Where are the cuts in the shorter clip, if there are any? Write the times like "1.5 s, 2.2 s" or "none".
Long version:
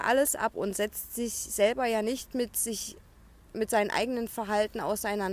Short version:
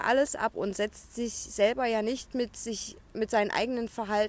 3.0 s